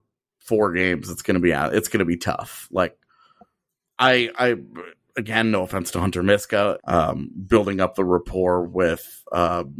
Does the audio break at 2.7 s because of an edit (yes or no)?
no